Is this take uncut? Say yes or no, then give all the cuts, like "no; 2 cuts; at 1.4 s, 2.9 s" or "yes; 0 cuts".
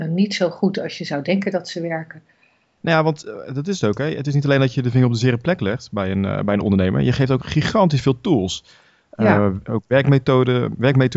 no; 1 cut; at 2.8 s